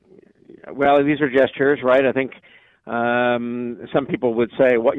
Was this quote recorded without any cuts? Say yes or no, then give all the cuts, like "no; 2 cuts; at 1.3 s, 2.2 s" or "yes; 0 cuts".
yes; 0 cuts